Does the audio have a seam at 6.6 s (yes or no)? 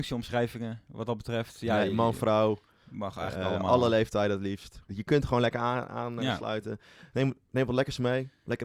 no